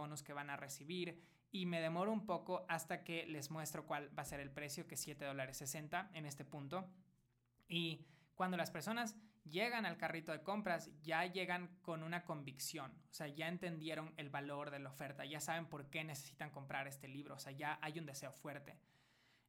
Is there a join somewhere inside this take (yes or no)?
no